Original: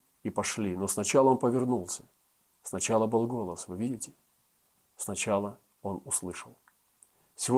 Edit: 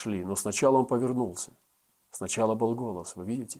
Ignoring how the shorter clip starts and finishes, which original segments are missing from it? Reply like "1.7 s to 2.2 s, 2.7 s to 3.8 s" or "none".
none